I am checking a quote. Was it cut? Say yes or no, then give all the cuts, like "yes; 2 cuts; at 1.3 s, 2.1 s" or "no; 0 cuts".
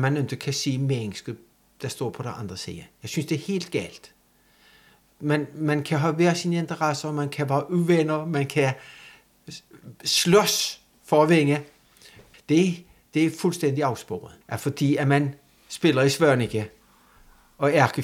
yes; 2 cuts; at 12.3 s, 14.4 s